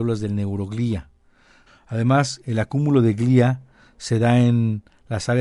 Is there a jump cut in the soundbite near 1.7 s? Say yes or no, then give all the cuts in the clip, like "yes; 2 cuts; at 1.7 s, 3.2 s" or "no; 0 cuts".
yes; 1 cut; at 1.7 s